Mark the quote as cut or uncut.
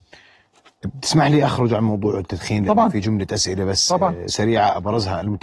uncut